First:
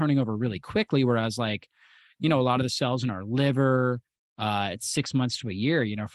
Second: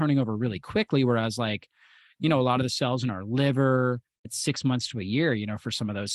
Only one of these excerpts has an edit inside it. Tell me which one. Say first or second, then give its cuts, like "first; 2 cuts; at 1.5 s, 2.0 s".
second; 1 cut; at 4.2 s